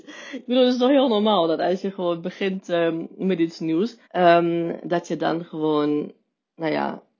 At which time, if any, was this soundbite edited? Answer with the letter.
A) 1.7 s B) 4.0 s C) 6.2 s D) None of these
B